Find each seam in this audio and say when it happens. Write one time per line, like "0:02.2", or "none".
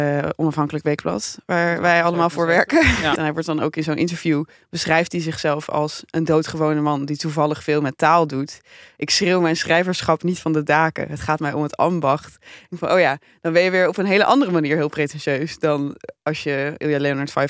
0:03.2